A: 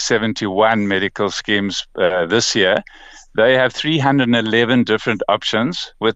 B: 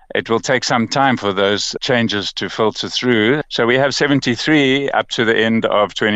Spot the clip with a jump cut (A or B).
B